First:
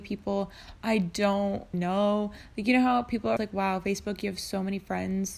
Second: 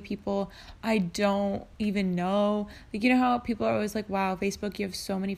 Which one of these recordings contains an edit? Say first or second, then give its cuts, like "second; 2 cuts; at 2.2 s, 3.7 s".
first; 2 cuts; at 1.7 s, 3.4 s